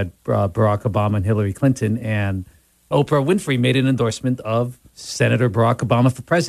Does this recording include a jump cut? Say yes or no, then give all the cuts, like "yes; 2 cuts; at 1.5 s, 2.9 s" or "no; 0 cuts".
yes; 1 cut; at 4.9 s